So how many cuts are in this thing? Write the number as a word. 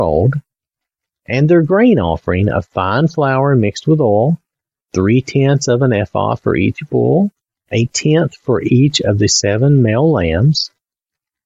one